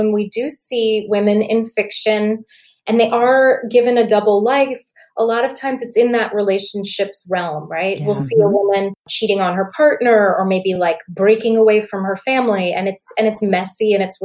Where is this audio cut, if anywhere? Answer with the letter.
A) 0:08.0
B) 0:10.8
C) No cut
C